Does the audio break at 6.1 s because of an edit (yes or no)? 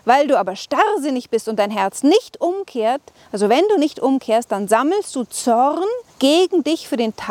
yes